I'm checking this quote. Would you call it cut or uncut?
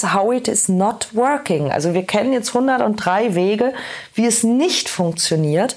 uncut